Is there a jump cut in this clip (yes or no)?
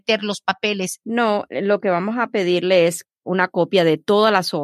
yes